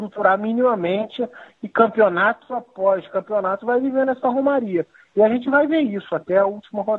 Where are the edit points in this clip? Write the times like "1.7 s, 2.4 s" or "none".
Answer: none